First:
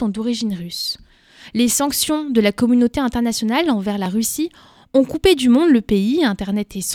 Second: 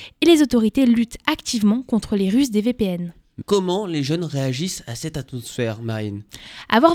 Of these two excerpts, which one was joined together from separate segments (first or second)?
second